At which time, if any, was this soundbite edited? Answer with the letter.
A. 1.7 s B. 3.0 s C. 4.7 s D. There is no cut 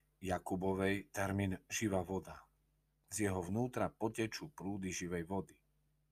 B